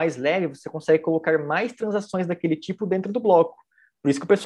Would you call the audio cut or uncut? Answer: uncut